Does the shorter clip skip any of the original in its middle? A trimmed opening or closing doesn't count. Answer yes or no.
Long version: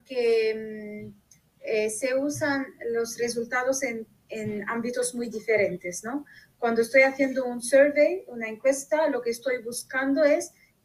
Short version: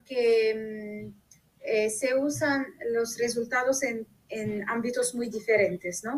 no